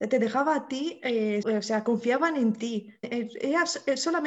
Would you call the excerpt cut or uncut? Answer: cut